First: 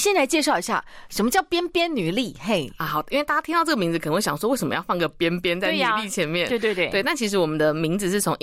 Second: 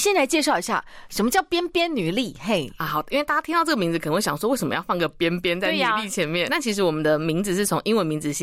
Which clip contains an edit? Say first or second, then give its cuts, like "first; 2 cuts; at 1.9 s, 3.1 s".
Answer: second; 1 cut; at 6.5 s